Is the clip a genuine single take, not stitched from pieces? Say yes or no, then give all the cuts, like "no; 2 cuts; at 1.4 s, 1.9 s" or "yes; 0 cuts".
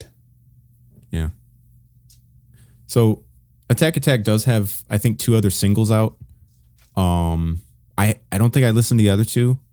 yes; 0 cuts